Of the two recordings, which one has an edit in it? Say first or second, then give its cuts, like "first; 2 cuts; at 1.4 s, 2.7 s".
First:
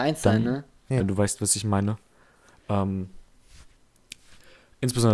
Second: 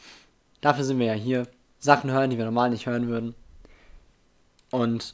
first; 1 cut; at 1.0 s